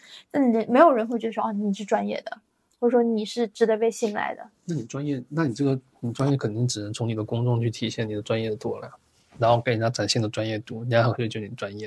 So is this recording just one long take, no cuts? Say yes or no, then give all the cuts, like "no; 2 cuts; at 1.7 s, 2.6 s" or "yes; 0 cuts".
yes; 0 cuts